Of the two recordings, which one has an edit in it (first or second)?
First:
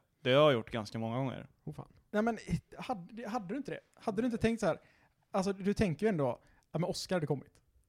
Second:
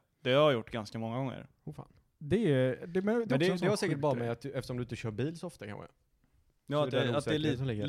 first